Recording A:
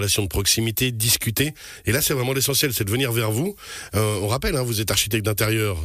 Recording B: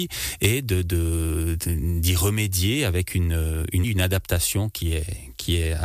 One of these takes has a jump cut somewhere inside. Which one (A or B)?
B